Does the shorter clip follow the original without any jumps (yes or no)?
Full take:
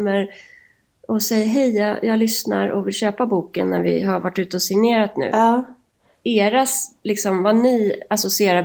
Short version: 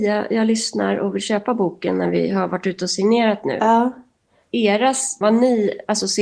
no